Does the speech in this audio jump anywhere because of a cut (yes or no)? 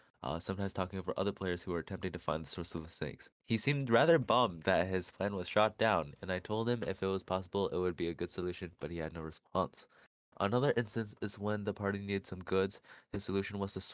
yes